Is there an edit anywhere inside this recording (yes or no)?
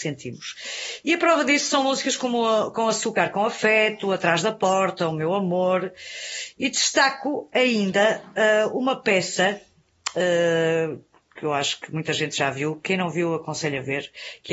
no